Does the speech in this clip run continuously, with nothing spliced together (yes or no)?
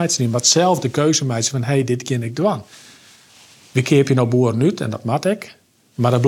yes